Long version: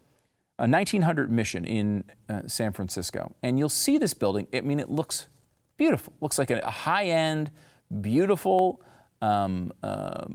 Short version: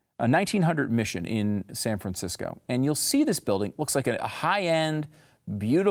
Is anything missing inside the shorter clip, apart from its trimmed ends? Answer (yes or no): yes